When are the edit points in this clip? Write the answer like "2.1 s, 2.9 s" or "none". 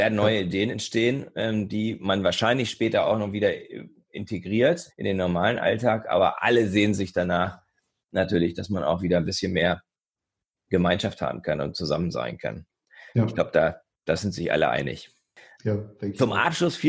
4.9 s